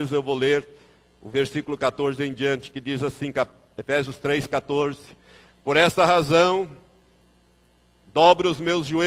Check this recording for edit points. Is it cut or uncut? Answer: uncut